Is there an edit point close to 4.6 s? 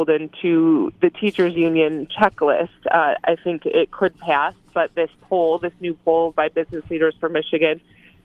no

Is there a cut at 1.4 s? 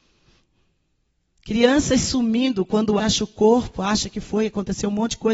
no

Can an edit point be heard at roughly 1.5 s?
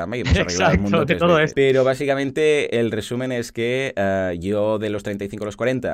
yes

